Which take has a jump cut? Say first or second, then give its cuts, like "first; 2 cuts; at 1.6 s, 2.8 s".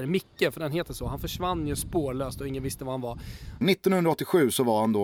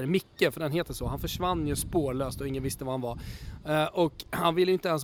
first; 1 cut; at 3.6 s